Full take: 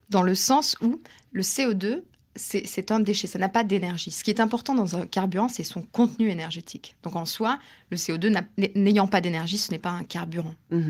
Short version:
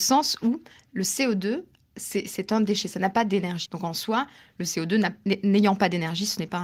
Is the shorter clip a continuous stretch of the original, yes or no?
no